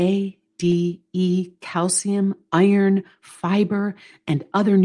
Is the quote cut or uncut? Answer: uncut